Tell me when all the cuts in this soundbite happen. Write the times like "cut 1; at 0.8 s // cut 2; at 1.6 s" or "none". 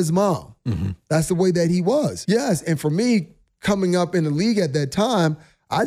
cut 1; at 2.2 s